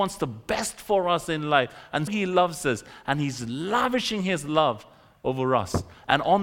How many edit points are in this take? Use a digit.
1